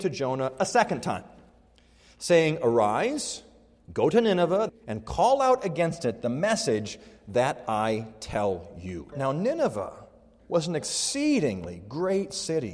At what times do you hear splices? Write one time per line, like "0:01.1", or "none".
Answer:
0:04.7
0:09.1